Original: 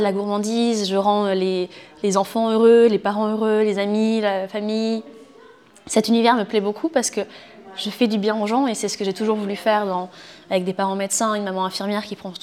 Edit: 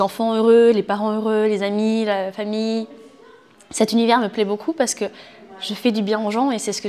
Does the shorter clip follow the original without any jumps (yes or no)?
yes